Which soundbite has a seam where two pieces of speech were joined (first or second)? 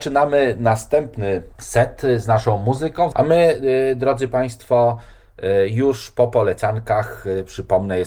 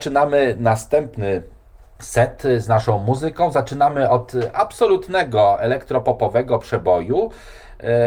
first